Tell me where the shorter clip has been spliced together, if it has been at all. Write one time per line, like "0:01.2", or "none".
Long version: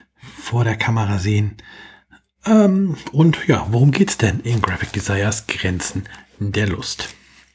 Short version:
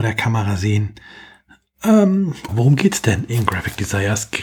0:02.5